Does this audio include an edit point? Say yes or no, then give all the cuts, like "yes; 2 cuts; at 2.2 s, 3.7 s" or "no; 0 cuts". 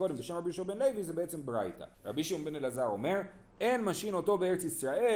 yes; 1 cut; at 1.9 s